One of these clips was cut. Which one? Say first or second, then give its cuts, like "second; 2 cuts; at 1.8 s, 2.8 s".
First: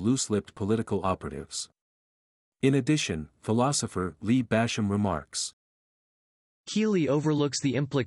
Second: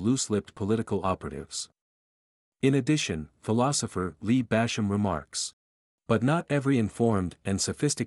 second; 1 cut; at 6.0 s